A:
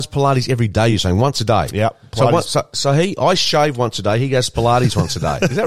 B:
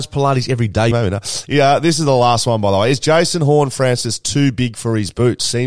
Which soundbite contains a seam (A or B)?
B